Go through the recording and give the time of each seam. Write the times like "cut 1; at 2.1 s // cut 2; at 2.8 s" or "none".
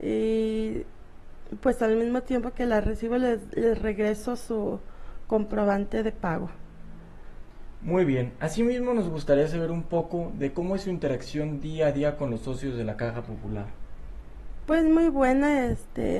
none